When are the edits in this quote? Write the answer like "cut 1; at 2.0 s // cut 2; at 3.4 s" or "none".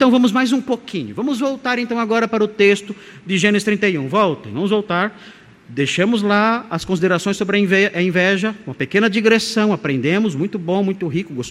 none

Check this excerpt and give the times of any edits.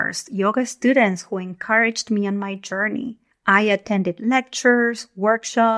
cut 1; at 3.3 s

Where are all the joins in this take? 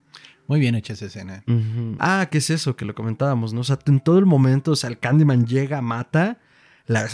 cut 1; at 2.0 s

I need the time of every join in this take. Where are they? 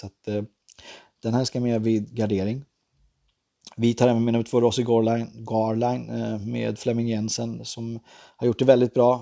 none

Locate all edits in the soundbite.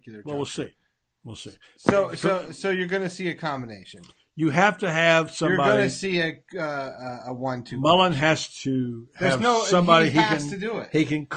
none

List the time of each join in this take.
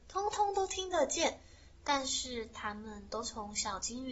none

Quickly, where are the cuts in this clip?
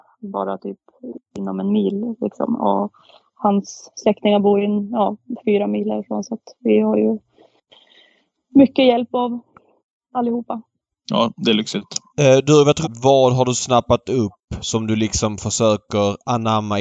cut 1; at 12.8 s

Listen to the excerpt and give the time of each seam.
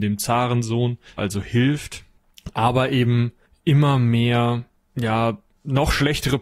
cut 1; at 1.2 s

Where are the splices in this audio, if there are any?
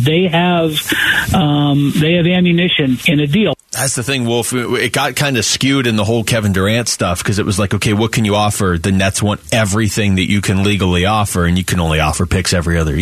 none

